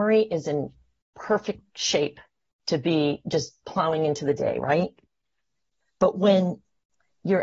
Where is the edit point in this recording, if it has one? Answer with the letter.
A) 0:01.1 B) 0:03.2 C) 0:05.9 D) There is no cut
D